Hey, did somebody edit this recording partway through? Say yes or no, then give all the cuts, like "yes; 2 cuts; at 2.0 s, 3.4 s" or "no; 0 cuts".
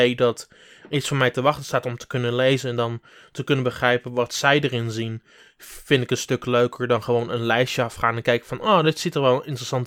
no; 0 cuts